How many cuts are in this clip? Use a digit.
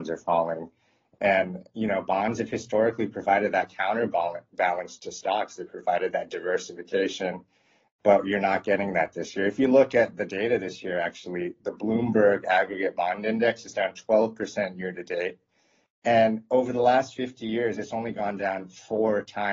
0